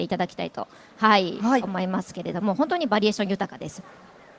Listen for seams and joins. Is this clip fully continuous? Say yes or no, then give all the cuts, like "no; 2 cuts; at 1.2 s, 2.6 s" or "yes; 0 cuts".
yes; 0 cuts